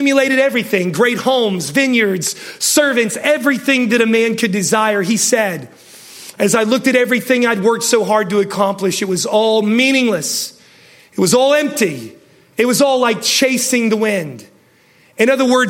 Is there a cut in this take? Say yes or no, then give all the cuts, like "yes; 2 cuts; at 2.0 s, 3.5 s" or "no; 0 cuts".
no; 0 cuts